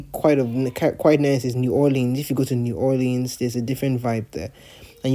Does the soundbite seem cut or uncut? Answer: uncut